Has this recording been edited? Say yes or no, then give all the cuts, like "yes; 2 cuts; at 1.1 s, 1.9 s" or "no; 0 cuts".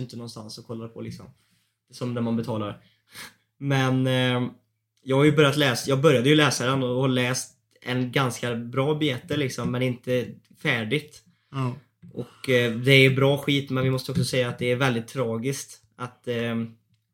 no; 0 cuts